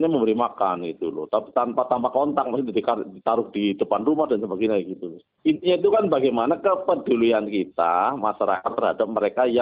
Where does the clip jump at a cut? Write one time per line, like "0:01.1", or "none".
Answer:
none